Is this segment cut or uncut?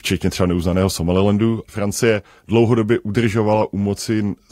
cut